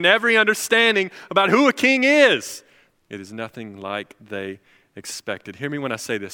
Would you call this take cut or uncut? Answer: cut